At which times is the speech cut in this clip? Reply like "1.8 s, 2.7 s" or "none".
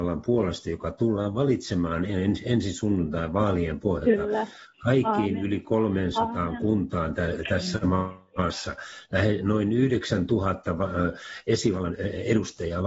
none